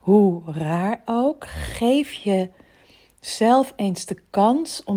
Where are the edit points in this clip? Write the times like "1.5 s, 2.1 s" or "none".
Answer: none